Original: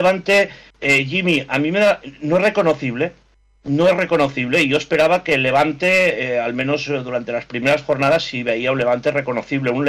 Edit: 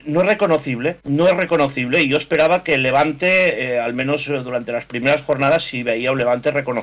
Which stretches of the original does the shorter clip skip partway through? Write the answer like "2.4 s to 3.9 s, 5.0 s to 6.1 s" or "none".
3.2 s to 3.6 s